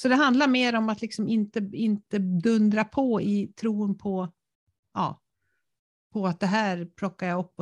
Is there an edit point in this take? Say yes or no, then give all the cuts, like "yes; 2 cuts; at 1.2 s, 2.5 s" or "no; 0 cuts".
no; 0 cuts